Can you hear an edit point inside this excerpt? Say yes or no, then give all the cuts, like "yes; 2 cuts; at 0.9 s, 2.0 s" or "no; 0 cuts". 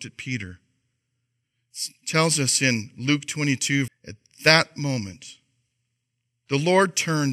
yes; 1 cut; at 3.9 s